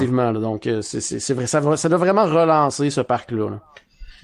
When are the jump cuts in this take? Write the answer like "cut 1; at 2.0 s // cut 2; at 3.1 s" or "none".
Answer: none